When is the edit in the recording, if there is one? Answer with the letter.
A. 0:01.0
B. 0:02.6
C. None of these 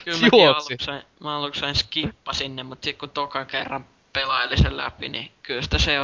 C